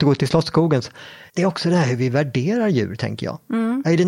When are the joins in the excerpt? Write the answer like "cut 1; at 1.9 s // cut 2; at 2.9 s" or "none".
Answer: cut 1; at 1.3 s

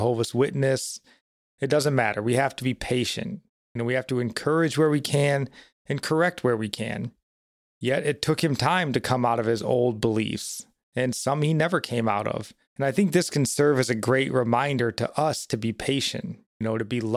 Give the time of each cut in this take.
cut 1; at 7.7 s // cut 2; at 12.7 s

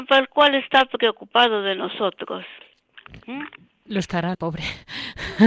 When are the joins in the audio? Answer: cut 1; at 4.3 s

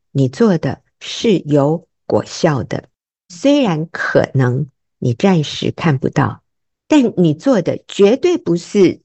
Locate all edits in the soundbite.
none

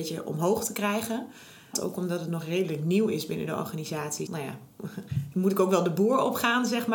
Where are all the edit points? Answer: cut 1; at 1.7 s // cut 2; at 4.3 s

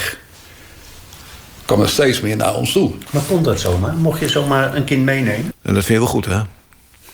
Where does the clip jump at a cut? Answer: cut 1; at 5.5 s

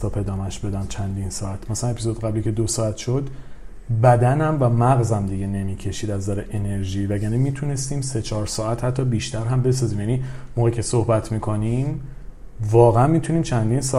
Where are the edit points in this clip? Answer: none

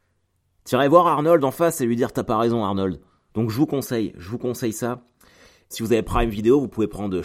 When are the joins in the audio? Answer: cut 1; at 3.3 s // cut 2; at 5.7 s

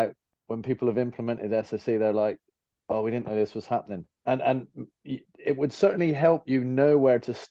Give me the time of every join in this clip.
cut 1; at 4.1 s

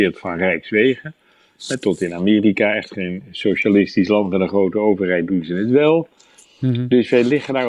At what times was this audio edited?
none

